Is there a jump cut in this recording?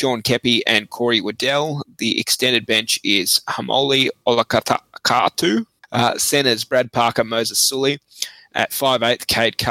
yes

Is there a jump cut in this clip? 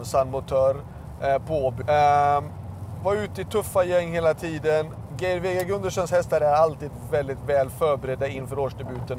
yes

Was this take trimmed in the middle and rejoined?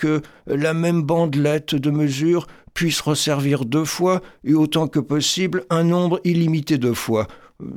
no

